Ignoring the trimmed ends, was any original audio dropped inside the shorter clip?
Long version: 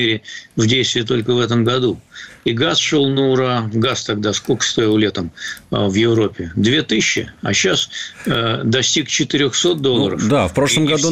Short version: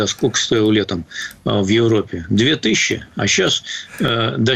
no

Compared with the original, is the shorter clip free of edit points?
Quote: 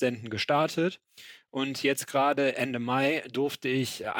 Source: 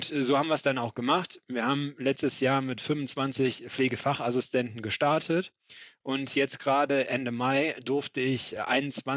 yes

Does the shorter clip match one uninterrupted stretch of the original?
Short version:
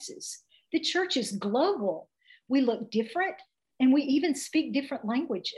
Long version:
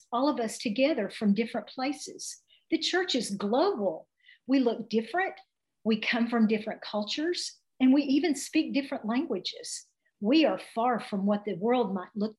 no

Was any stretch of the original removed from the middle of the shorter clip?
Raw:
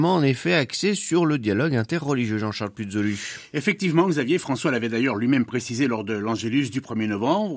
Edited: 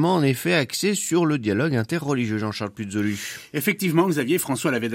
no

